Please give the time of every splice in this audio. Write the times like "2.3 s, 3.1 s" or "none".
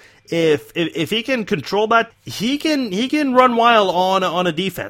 2.1 s